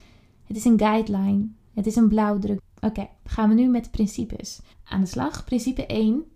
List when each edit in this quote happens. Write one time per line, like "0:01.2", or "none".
0:02.6
0:04.7